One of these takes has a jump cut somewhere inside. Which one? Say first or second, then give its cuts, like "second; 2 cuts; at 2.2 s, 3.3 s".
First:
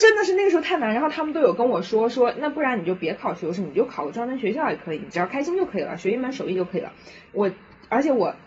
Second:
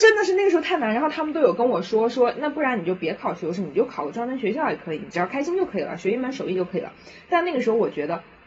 first; 1 cut; at 7.3 s